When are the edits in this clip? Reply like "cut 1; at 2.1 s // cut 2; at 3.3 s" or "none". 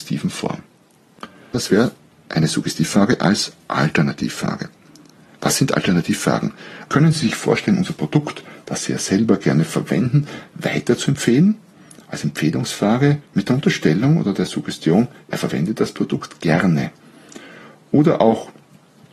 cut 1; at 1.5 s // cut 2; at 5.3 s // cut 3; at 6.8 s